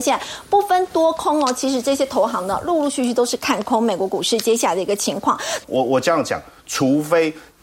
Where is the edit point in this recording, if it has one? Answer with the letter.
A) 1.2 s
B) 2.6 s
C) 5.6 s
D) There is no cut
C